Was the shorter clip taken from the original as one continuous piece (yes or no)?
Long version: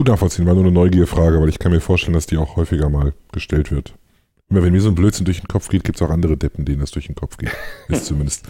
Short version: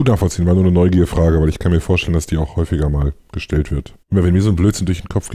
no